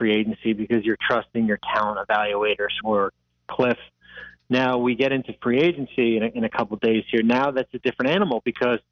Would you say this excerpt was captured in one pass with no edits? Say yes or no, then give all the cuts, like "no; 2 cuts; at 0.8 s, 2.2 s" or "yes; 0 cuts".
no; 2 cuts; at 2.8 s, 4.5 s